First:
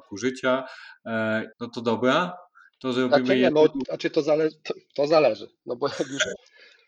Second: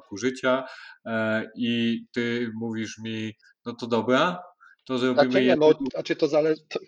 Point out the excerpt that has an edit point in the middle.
first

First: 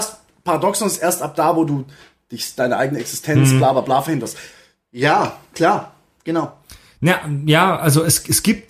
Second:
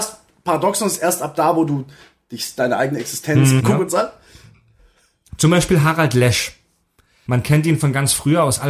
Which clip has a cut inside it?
second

